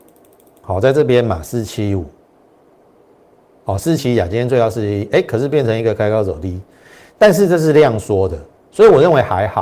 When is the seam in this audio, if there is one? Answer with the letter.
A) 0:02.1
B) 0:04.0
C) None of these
B